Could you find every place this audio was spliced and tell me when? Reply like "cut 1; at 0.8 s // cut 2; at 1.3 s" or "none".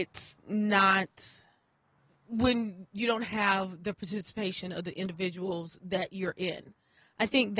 none